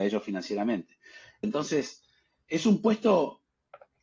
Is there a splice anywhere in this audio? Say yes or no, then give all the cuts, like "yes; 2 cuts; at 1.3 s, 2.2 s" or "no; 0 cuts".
yes; 1 cut; at 1.4 s